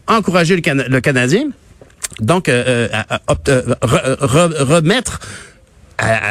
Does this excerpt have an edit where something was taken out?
yes; 1 cut; at 2.2 s

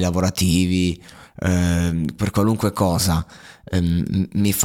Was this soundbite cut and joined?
no; 0 cuts

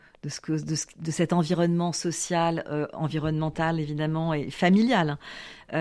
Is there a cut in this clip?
no; 0 cuts

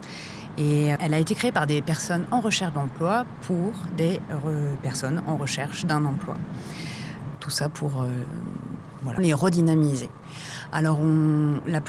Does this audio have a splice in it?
yes; 3 cuts; at 1.0 s, 7.3 s, 9.2 s

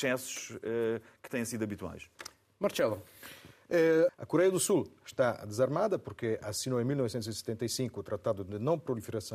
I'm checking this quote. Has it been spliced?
yes; 1 cut; at 4.1 s

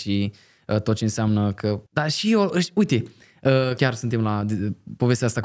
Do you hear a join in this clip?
yes; 2 cuts; at 1.9 s, 3.8 s

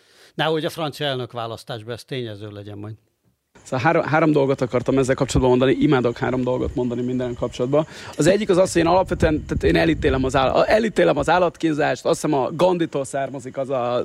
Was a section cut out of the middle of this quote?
no; 0 cuts

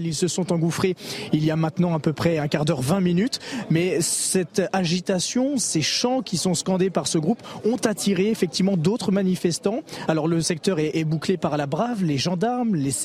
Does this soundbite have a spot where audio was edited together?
no; 0 cuts

